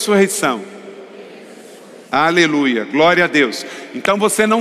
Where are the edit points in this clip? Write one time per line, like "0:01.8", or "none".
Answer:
0:02.0